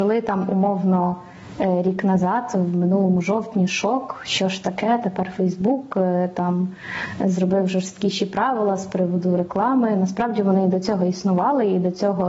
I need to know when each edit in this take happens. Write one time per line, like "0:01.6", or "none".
none